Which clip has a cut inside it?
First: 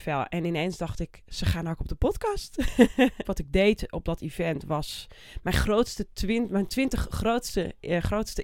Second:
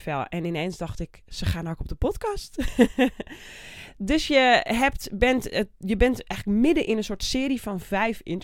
first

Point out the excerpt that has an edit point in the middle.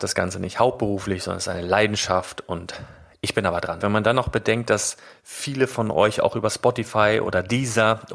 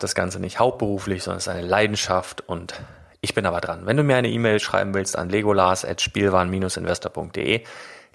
first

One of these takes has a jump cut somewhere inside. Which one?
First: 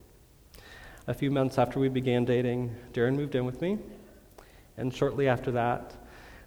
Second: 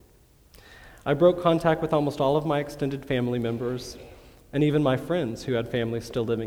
first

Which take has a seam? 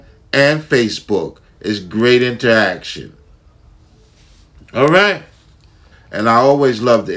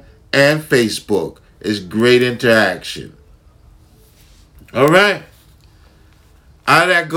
first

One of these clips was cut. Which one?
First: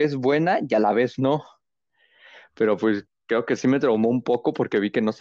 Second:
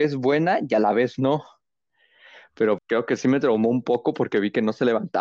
second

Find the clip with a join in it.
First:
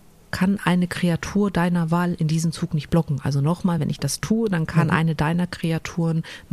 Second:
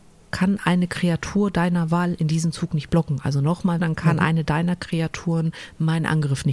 second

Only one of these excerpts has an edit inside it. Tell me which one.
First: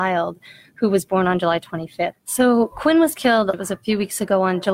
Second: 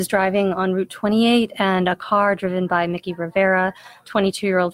first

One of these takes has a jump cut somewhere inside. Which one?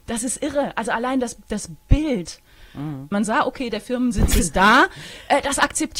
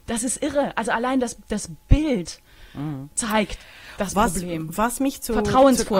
first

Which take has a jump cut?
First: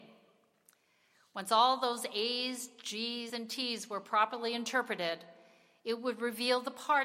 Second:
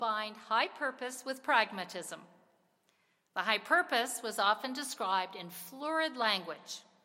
first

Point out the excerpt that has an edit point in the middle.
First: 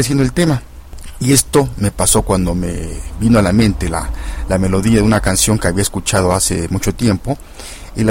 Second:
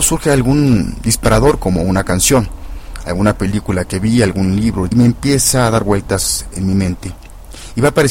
second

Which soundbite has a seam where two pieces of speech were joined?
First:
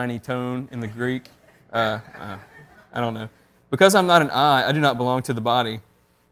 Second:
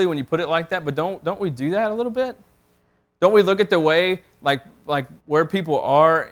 second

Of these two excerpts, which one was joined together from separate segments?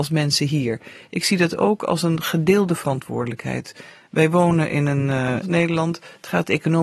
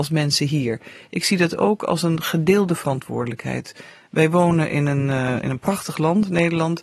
first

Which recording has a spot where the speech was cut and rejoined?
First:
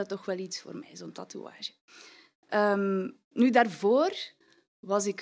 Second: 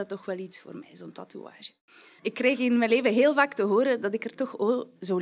second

